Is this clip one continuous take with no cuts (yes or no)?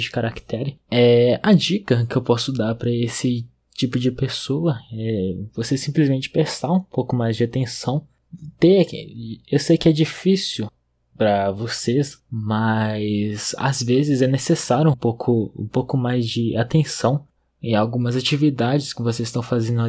no